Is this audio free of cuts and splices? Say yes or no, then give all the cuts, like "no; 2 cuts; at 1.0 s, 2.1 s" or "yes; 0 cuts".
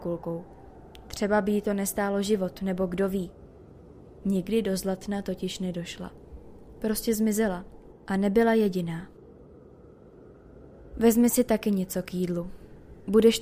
yes; 0 cuts